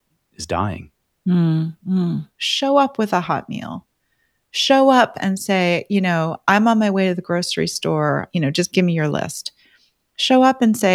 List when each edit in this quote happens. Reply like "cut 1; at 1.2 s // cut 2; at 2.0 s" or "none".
cut 1; at 2.3 s // cut 2; at 8.3 s